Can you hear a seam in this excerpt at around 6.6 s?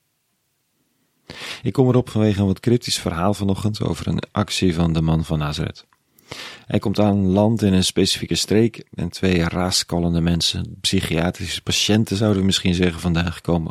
no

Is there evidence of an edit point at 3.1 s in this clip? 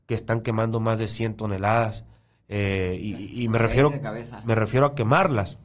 yes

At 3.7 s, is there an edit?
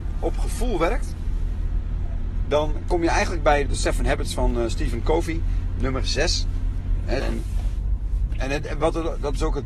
yes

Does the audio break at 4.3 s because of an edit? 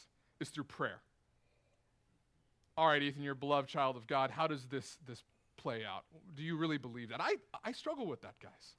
no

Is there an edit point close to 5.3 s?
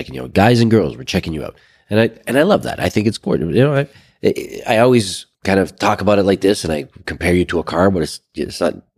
yes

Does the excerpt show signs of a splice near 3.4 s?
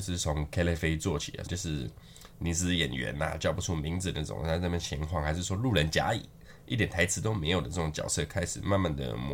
no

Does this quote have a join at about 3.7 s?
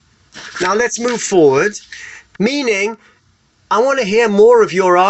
no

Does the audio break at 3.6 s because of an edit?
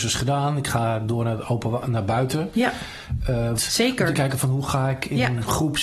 yes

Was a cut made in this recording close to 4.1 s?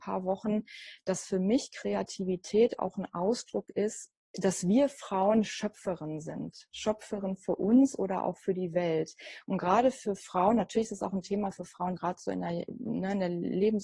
yes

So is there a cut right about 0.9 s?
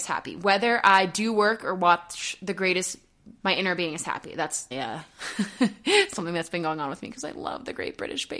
no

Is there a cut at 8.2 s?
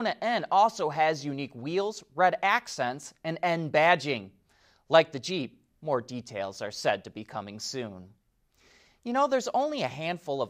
no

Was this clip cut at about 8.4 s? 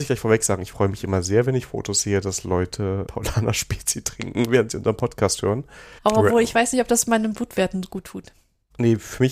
no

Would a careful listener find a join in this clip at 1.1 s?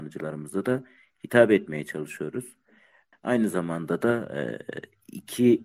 no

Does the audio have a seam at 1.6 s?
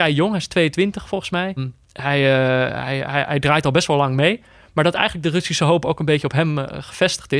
yes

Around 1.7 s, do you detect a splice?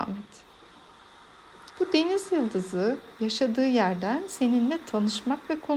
yes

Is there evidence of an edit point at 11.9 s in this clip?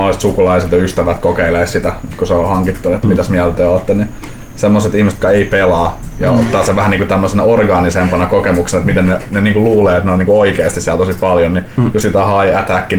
no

